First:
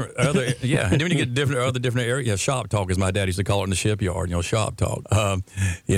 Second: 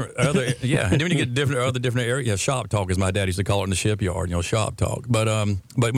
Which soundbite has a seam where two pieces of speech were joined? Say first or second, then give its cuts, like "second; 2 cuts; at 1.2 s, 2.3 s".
first; 1 cut; at 5.0 s